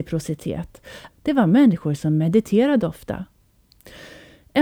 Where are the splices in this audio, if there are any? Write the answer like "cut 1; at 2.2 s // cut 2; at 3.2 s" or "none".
cut 1; at 1.1 s